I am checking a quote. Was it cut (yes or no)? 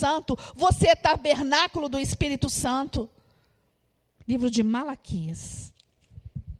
yes